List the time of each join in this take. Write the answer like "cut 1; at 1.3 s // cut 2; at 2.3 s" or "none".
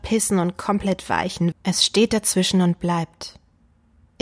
cut 1; at 1.5 s